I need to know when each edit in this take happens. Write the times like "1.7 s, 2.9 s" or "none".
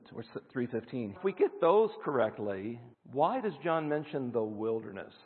1.2 s, 2.9 s

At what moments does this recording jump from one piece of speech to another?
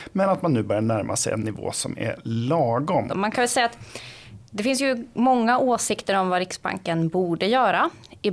3.1 s

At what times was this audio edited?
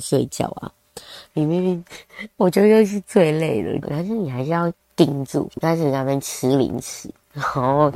1.3 s, 3.8 s, 5.5 s

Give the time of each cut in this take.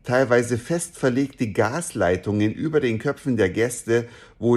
none

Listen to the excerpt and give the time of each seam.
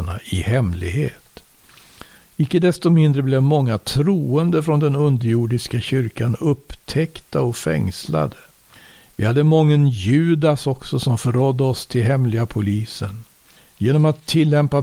none

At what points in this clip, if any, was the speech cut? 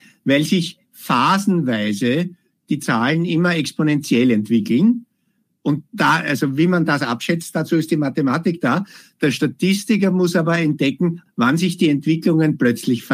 11.3 s

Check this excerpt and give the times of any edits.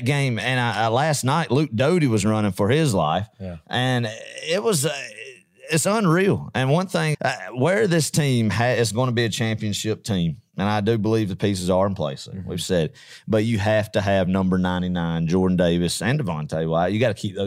7.1 s

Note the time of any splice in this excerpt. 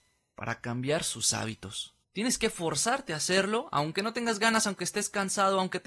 2.0 s

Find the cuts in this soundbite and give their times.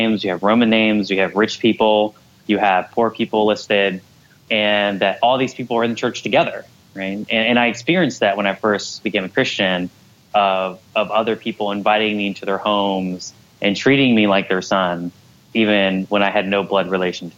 none

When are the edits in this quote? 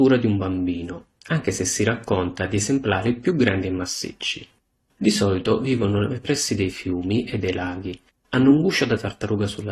none

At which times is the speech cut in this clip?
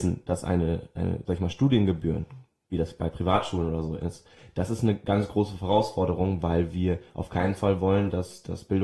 none

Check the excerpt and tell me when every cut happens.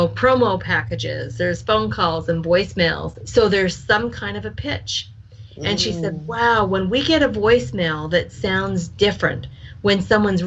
3.2 s

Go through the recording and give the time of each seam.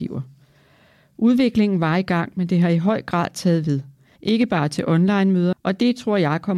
4.2 s, 5.5 s

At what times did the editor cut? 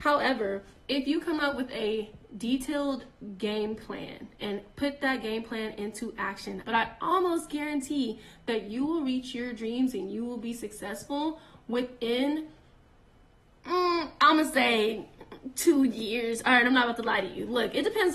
4.4 s, 6.6 s

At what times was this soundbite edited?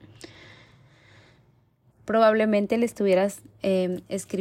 1.9 s

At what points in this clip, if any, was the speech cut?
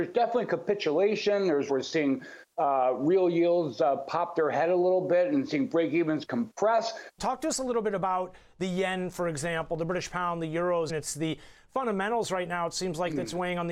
1.7 s, 7.2 s, 10.9 s

